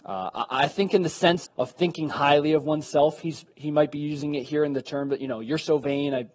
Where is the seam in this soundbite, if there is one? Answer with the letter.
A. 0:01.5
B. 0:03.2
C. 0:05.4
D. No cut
A